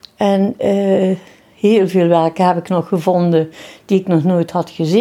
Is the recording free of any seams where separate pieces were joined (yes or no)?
yes